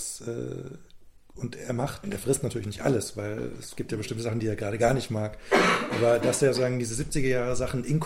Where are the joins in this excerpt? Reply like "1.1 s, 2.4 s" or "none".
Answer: 2.0 s